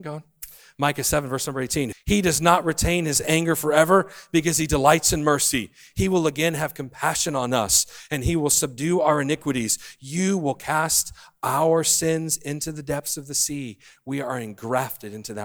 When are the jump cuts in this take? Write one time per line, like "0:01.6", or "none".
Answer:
0:01.9